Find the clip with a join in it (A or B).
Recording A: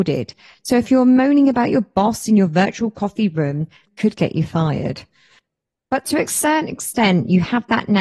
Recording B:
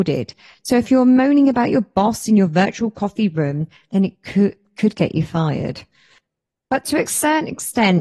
A